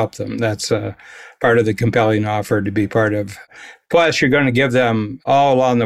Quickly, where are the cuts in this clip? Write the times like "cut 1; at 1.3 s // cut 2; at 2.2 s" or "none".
none